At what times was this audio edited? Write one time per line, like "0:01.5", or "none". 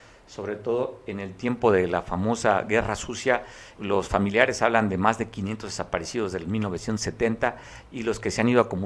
0:03.7